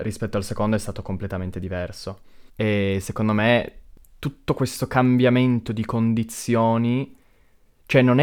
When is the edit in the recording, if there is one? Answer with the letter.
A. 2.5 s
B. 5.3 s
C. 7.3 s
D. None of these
A